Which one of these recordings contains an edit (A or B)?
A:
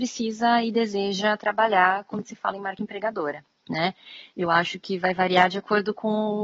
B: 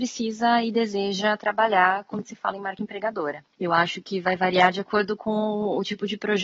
B